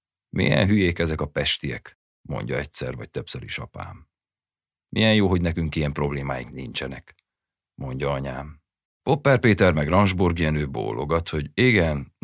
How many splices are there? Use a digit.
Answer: 1